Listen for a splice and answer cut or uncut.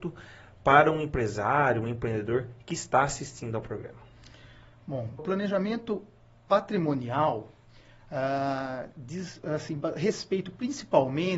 cut